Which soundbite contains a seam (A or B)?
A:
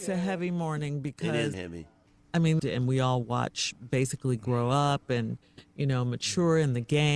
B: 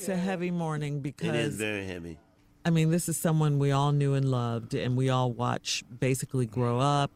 A